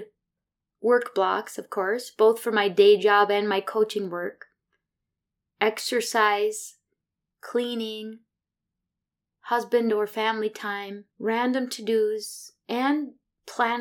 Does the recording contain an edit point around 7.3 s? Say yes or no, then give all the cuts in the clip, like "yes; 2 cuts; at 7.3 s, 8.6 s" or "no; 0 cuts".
yes; 2 cuts; at 7.3 s, 11.1 s